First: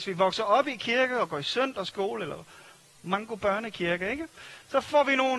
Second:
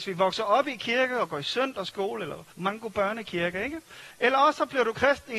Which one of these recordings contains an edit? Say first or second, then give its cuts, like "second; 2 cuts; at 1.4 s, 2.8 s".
second; 2 cuts; at 2.5 s, 4.1 s